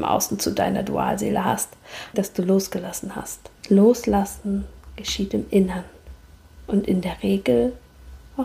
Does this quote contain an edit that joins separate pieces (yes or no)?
yes